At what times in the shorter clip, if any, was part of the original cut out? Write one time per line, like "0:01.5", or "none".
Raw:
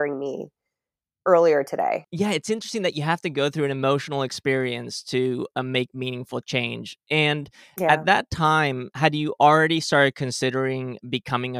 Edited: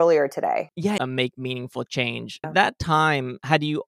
0:01.0
0:02.4